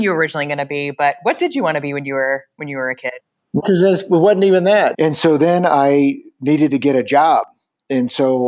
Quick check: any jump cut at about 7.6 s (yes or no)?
no